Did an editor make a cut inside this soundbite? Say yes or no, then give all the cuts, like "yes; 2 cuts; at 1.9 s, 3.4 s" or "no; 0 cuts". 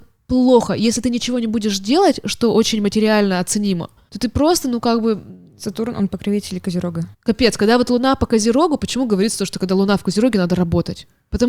yes; 1 cut; at 7.1 s